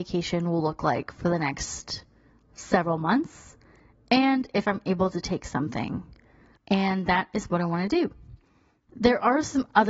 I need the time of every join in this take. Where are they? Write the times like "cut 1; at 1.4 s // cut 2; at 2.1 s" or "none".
cut 1; at 6.6 s // cut 2; at 8.9 s